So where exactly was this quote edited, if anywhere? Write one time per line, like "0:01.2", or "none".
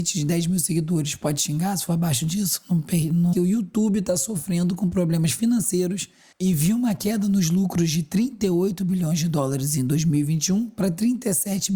0:03.3